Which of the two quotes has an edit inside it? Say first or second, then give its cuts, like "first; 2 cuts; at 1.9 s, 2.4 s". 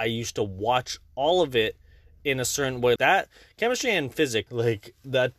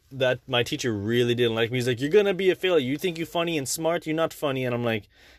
first; 2 cuts; at 3.0 s, 4.5 s